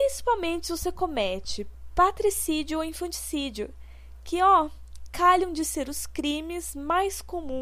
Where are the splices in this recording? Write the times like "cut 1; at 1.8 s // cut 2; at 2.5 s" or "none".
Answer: none